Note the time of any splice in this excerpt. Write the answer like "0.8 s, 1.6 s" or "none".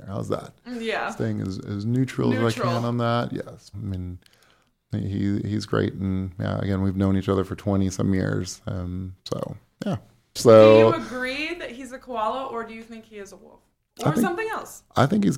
3.7 s, 10.4 s